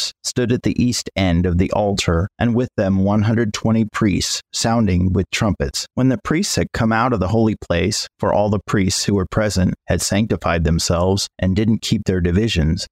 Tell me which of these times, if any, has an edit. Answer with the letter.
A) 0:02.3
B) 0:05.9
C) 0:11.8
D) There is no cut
B